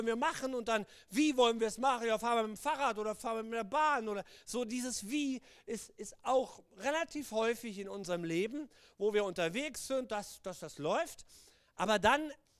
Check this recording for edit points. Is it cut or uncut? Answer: uncut